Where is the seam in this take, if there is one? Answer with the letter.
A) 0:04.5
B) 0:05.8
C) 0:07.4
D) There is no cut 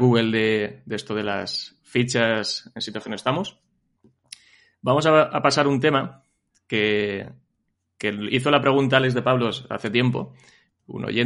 D